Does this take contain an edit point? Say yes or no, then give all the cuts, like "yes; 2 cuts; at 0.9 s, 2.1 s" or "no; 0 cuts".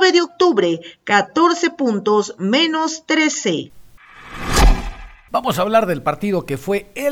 no; 0 cuts